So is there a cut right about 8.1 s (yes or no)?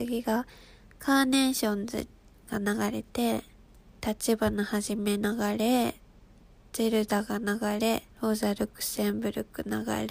yes